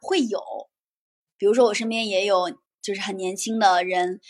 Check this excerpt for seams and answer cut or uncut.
cut